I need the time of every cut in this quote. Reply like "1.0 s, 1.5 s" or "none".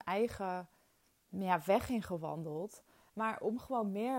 3.1 s